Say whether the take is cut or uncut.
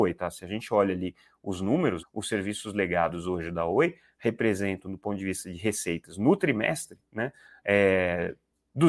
cut